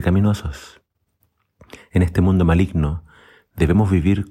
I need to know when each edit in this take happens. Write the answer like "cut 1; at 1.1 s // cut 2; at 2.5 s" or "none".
none

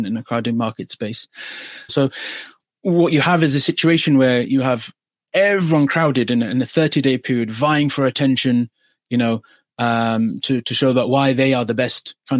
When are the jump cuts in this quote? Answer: cut 1; at 1.9 s

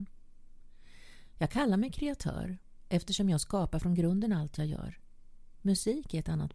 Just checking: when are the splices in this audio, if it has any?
cut 1; at 1.3 s

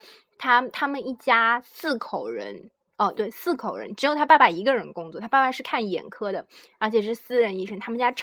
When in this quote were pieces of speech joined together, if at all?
cut 1; at 3.1 s

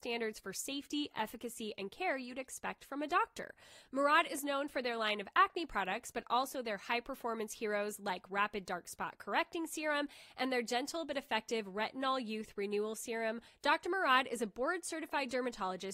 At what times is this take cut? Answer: cut 1; at 13.5 s

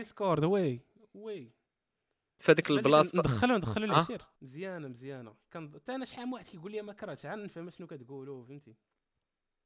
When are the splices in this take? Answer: cut 1; at 4.4 s

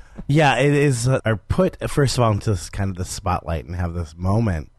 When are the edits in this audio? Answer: cut 1; at 1.2 s

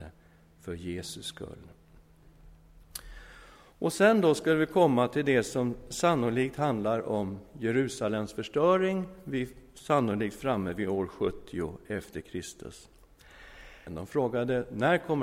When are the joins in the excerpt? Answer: cut 1; at 13.9 s

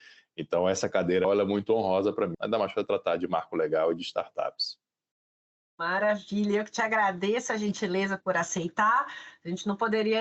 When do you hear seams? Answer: cut 1; at 1.2 s // cut 2; at 2.3 s

